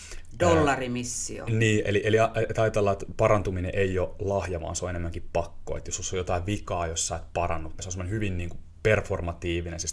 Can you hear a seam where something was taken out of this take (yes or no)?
yes